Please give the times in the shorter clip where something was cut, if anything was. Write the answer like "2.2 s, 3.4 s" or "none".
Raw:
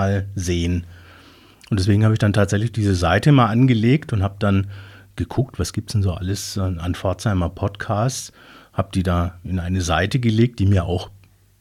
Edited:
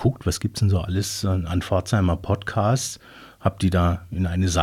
none